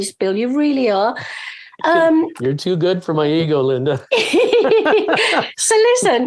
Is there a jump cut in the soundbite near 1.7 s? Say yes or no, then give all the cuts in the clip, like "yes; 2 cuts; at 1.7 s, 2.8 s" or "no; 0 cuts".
no; 0 cuts